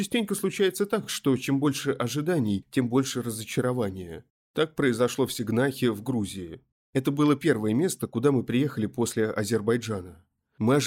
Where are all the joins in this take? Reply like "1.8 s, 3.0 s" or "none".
none